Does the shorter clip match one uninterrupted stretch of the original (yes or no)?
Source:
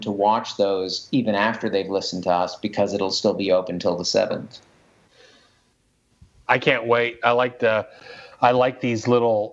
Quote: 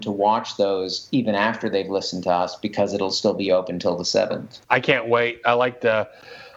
no